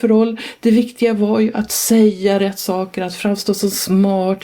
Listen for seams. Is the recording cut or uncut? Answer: uncut